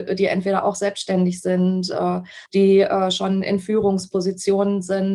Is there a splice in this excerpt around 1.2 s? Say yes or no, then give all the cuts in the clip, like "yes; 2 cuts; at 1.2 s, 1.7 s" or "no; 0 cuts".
no; 1 cut; at 2.5 s